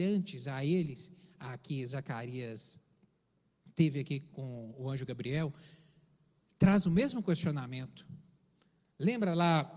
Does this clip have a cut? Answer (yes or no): no